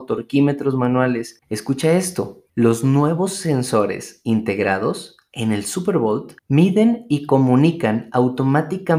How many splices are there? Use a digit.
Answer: 2